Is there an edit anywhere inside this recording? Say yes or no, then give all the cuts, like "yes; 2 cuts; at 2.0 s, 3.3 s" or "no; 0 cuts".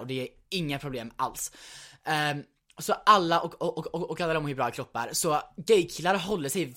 no; 0 cuts